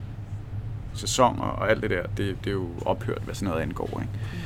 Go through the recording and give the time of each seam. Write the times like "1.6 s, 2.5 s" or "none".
0.9 s